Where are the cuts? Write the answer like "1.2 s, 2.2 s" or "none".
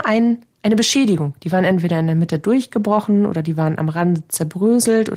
none